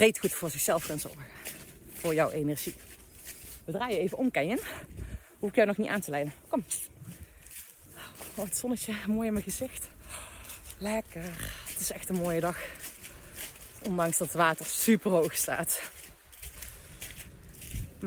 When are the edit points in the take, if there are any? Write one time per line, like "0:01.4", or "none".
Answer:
0:03.6